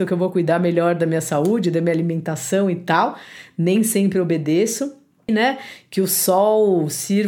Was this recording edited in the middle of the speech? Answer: yes; 1 cut; at 5.3 s

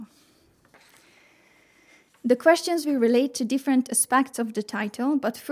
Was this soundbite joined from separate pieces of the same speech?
no; 0 cuts

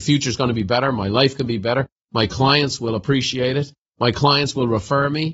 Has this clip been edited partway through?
no; 0 cuts

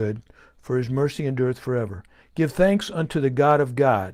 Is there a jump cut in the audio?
no; 0 cuts

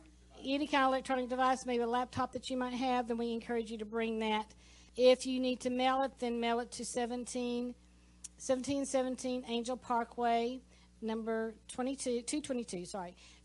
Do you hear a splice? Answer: yes; 1 cut; at 4.9 s

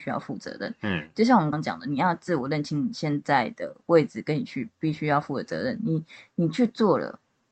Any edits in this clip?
yes; 1 cut; at 1.5 s

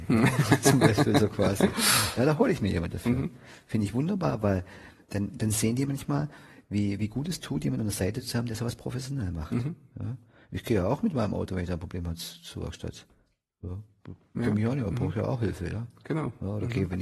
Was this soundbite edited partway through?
no; 0 cuts

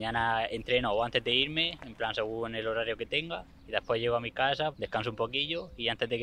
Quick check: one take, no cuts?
no; 1 cut; at 4.7 s

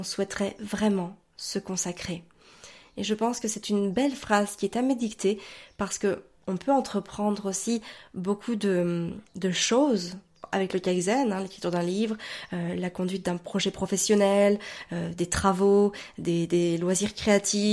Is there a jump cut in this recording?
no; 0 cuts

